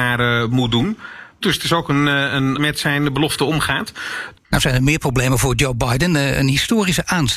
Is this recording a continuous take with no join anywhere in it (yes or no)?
no